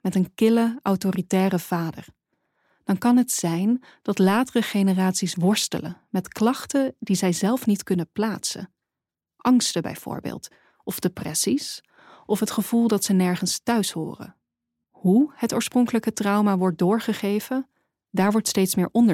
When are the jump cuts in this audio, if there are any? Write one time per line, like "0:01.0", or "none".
none